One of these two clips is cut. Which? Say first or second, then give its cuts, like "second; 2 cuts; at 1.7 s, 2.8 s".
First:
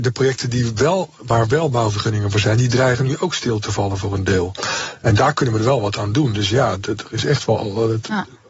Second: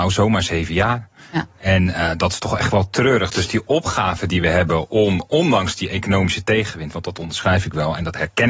first; 1 cut; at 6.8 s